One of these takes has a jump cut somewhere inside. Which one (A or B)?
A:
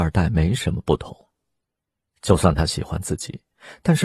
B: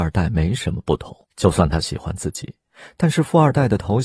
B